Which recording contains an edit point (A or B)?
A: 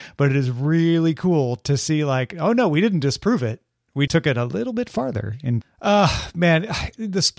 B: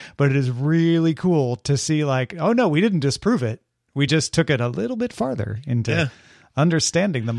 A